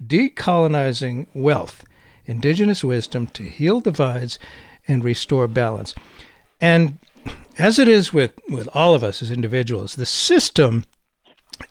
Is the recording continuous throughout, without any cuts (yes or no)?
yes